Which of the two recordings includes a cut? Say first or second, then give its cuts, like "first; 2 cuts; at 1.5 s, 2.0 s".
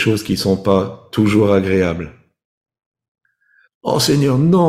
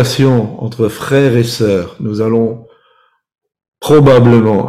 first; 1 cut; at 3.6 s